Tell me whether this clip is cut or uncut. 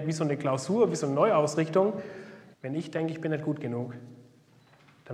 cut